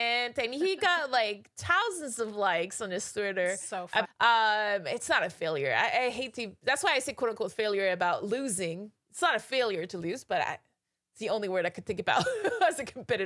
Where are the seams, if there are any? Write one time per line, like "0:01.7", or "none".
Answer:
0:04.0